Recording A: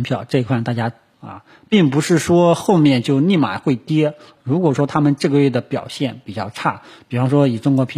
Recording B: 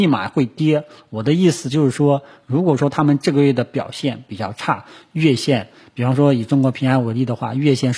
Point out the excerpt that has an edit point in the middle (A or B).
A